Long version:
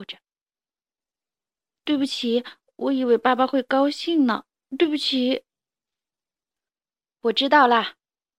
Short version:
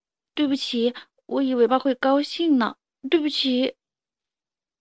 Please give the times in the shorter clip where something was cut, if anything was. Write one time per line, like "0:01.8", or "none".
0:01.7